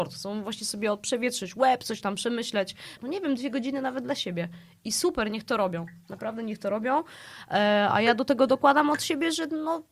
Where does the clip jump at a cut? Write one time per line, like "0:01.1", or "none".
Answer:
0:03.0